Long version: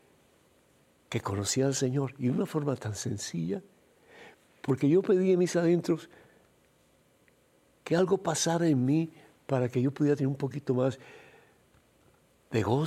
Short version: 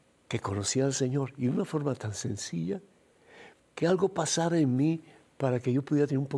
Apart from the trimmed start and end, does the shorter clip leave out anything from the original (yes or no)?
yes